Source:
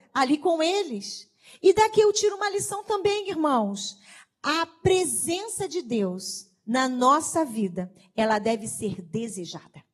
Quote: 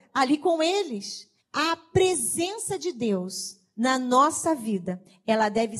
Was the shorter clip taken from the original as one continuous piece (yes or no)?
no